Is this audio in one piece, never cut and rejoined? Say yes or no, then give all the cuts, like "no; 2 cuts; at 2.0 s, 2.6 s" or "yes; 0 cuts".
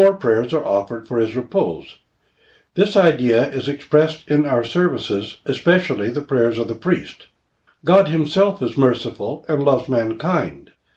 no; 2 cuts; at 2.7 s, 7.7 s